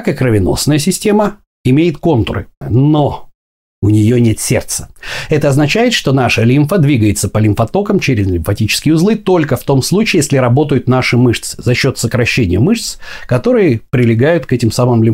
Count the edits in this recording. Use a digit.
1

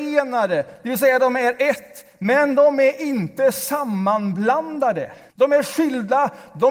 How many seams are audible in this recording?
1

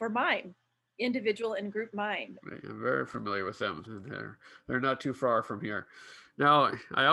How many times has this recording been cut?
2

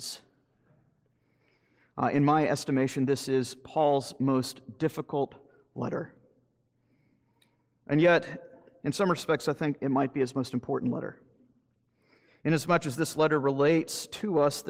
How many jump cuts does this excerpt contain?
0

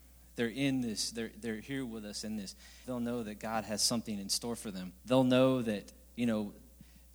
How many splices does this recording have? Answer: 2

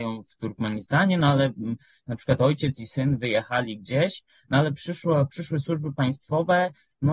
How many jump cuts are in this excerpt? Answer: 0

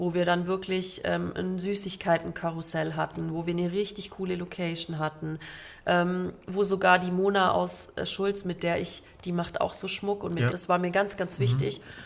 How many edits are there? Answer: 1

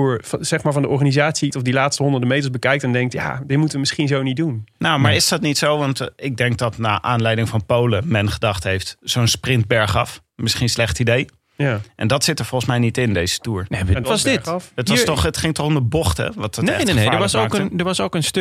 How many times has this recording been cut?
2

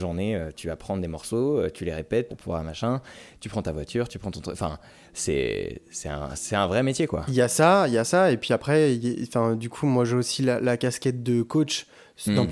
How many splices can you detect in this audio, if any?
1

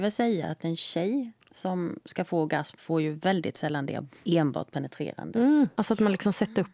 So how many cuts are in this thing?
1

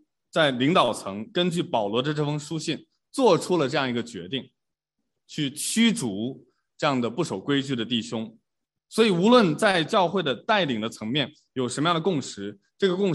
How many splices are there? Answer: 1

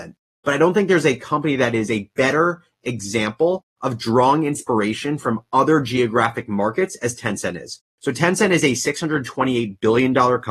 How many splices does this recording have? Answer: 0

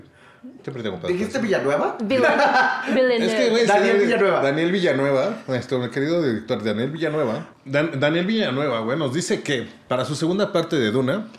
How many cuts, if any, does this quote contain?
1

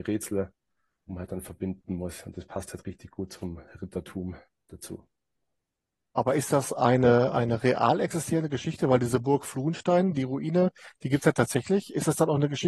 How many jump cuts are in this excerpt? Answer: 0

